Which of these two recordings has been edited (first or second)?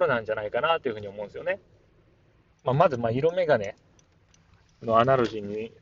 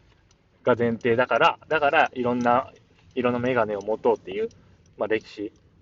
first